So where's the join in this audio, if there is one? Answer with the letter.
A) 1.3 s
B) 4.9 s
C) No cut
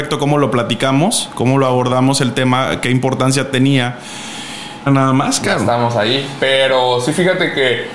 B